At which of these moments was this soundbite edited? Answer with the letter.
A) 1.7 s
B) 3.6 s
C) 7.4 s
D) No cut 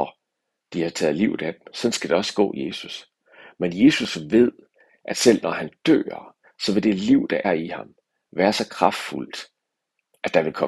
C